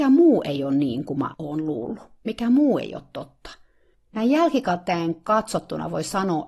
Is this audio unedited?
no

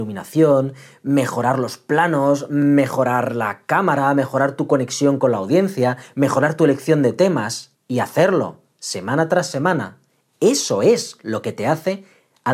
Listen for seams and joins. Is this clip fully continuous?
yes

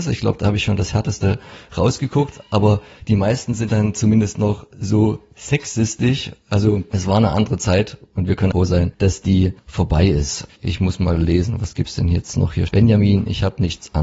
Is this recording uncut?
yes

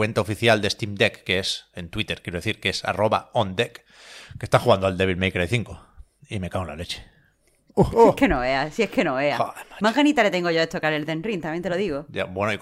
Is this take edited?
yes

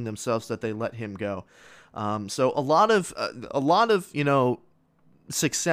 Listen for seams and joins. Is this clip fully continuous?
yes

